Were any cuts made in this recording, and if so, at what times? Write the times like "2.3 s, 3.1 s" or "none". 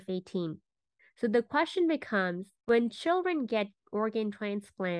1.0 s, 2.6 s